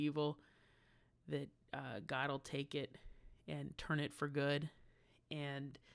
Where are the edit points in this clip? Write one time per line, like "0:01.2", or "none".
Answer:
none